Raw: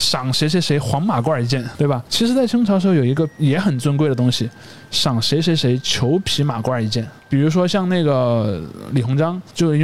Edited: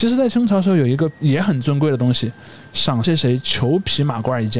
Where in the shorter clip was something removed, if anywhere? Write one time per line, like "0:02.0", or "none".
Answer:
0:03.0